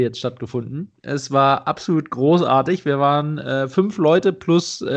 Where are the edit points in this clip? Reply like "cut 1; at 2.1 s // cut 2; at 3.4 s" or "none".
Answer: none